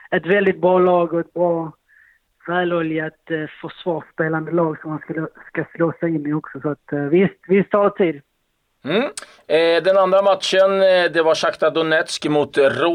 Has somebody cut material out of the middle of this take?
no; 0 cuts

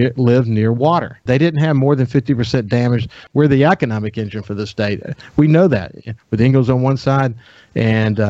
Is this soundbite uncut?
no; 2 cuts; at 1.3 s, 3.3 s

